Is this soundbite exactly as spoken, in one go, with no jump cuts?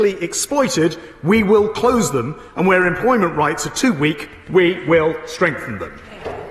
yes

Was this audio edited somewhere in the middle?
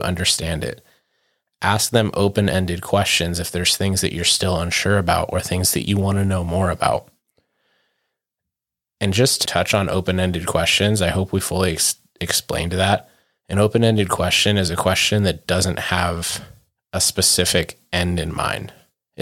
no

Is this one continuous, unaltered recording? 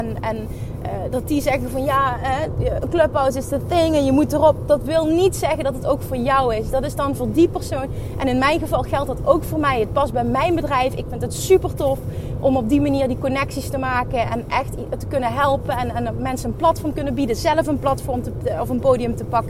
yes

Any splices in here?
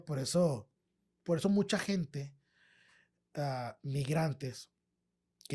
no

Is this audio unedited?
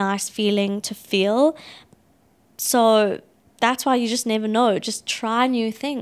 yes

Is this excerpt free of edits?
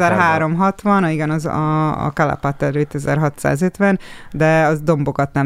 yes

